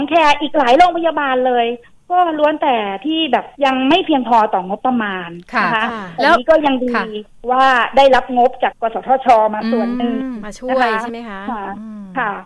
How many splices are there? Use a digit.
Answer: 2